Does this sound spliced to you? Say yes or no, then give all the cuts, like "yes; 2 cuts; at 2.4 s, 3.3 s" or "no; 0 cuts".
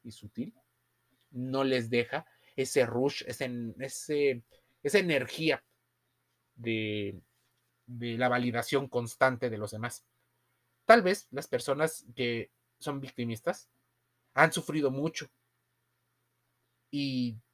no; 0 cuts